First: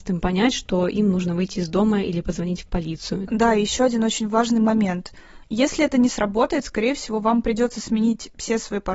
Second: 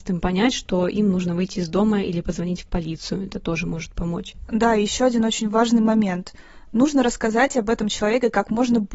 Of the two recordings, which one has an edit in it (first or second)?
first